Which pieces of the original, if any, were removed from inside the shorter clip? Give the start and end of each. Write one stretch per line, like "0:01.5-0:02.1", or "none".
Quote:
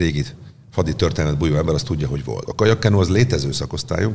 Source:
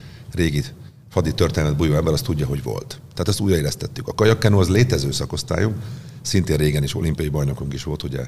0:02.8-0:04.0